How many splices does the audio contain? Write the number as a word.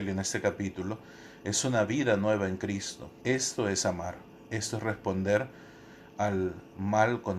one